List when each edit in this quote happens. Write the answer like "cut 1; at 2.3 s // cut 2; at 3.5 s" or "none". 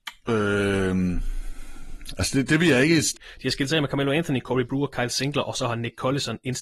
cut 1; at 3.1 s